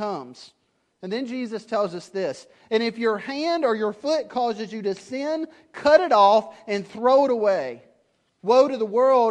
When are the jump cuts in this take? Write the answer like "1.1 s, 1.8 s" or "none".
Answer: 8.4 s